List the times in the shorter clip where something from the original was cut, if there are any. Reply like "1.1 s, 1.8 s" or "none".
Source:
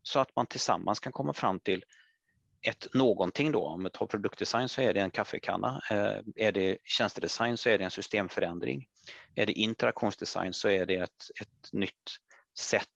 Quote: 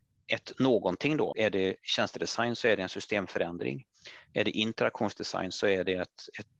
1.3 s

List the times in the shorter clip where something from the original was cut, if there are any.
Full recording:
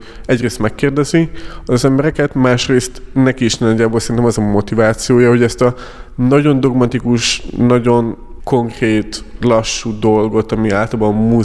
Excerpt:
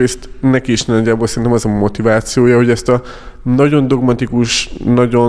none

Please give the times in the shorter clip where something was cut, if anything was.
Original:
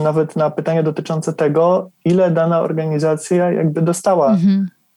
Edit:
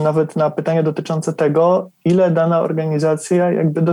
none

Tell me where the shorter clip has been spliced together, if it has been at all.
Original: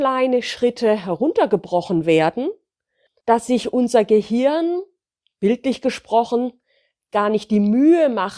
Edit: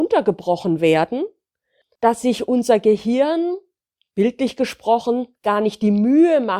5.3 s

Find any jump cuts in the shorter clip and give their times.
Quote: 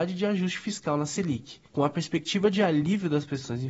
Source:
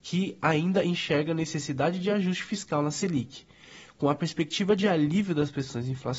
1.7 s

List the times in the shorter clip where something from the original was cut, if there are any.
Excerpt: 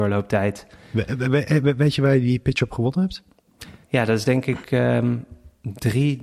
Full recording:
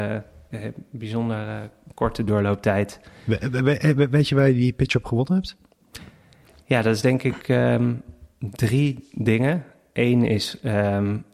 3.8 s

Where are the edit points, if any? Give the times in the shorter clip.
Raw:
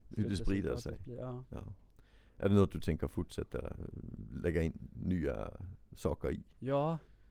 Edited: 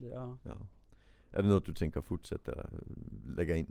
none

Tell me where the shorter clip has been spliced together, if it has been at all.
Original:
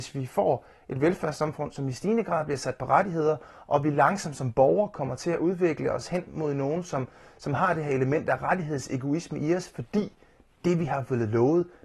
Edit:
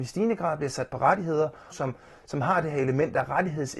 1.7 s

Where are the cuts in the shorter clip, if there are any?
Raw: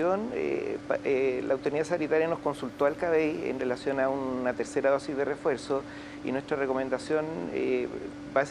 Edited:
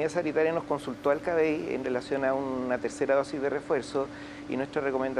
none

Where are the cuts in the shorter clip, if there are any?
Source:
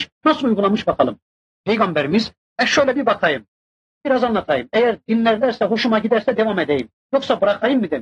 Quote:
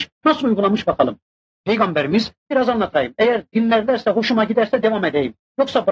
2.4 s

